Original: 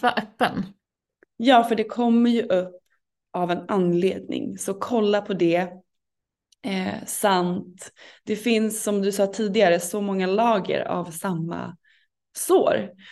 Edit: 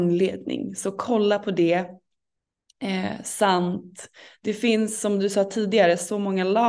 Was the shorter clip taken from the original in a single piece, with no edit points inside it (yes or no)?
yes